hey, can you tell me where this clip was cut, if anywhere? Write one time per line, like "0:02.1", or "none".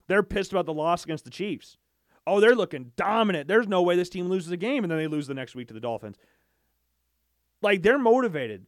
none